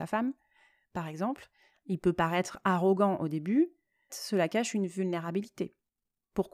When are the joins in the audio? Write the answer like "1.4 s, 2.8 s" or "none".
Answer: 1.7 s, 4.1 s